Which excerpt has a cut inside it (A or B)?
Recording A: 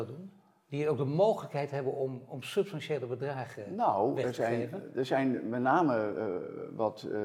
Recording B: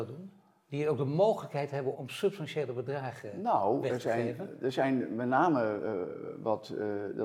B